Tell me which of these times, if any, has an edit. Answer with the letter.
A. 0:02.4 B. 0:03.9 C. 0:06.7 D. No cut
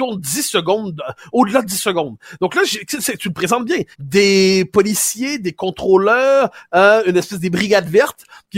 B